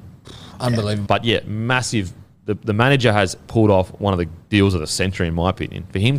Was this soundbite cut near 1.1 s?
yes; 1 cut; at 1.1 s

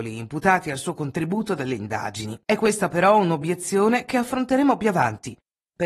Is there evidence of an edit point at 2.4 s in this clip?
yes; 1 cut; at 2.4 s

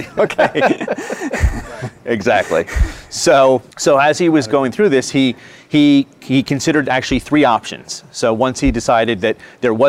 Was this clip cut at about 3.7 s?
yes; 1 cut; at 3.7 s

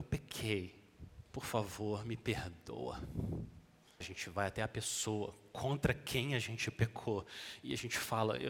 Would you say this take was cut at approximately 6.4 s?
no; 2 cuts; at 1.3 s, 4.0 s

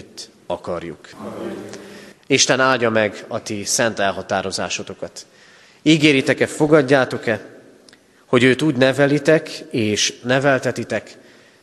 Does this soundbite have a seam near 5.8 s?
no; 1 cut; at 1.1 s

